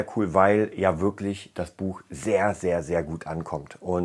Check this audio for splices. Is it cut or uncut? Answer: uncut